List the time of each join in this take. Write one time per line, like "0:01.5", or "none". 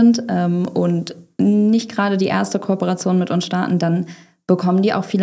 none